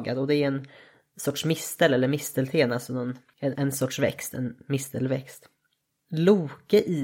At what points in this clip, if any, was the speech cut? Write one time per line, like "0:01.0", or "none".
0:03.5